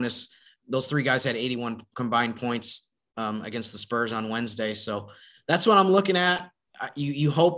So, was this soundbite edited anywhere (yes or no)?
no